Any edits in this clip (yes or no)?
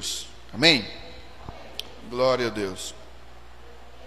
no